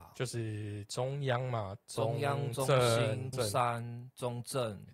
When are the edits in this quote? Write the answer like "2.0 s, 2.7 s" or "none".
3.3 s